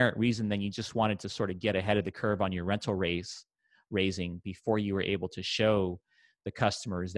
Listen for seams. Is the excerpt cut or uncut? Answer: uncut